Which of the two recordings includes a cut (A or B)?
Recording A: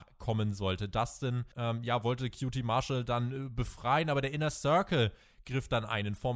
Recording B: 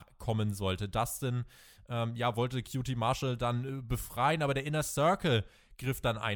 A